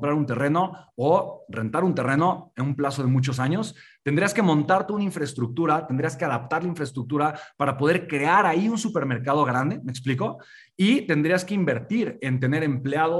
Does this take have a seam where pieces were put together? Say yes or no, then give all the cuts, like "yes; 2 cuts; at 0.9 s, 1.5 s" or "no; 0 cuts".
no; 0 cuts